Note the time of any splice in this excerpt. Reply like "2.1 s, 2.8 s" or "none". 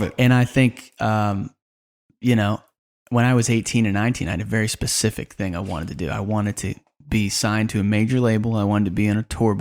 none